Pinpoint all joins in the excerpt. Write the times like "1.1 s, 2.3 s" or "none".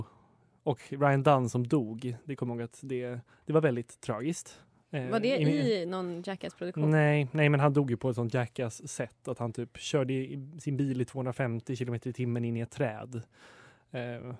none